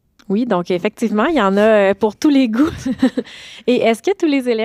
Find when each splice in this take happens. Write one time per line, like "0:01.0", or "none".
none